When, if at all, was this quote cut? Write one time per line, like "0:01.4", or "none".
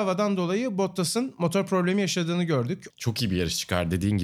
0:02.9